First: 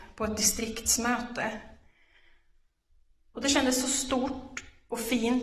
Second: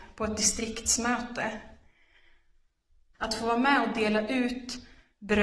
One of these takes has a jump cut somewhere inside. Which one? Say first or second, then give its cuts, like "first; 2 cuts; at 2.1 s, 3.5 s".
second; 1 cut; at 3.1 s